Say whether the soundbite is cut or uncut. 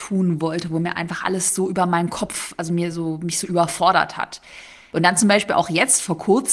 uncut